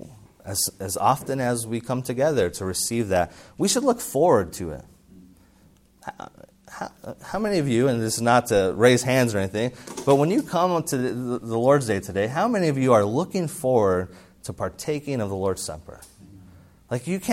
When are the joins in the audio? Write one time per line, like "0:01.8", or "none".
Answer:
none